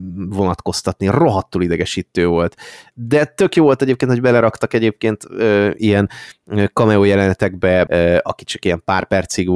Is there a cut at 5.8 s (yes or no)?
no